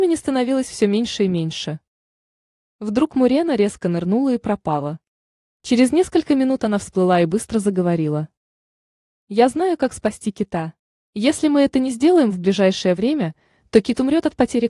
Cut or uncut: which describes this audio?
cut